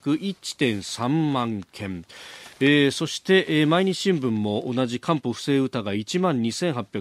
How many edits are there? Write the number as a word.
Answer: zero